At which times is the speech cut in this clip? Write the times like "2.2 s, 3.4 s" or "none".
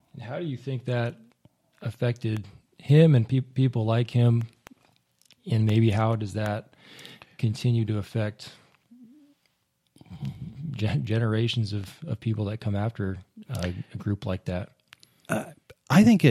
none

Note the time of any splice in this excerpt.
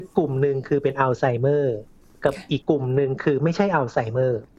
2.6 s

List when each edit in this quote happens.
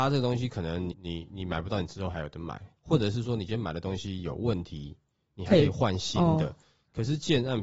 0.9 s

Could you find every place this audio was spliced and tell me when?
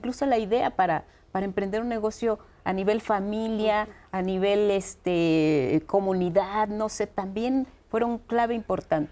none

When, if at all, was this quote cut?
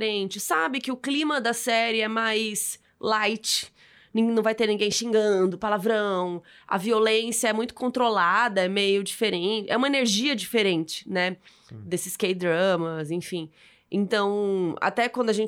none

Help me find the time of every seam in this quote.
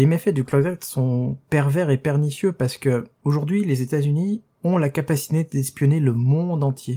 4.6 s

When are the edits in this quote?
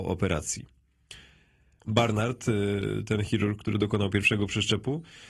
1.8 s

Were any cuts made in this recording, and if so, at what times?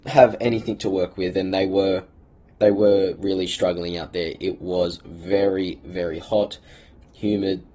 3.2 s

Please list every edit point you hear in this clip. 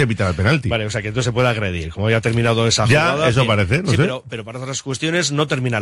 none

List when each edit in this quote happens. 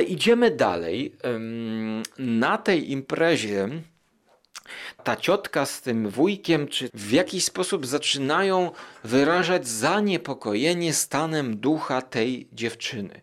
5.0 s, 6.9 s

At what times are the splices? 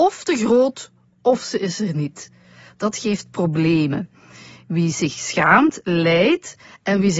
none

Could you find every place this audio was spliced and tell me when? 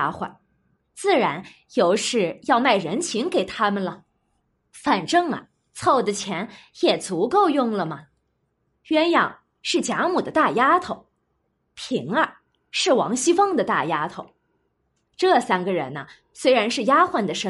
8.7 s, 11.6 s

